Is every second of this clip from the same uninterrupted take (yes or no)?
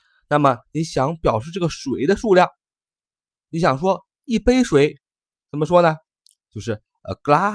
yes